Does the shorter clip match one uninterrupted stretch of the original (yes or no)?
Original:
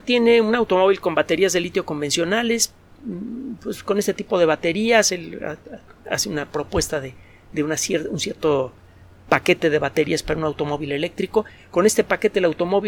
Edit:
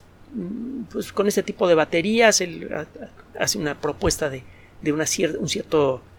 yes